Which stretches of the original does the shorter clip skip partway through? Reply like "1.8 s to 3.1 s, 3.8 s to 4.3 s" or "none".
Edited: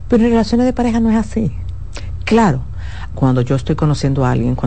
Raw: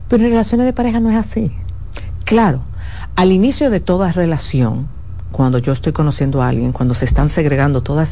3.1 s to 5.3 s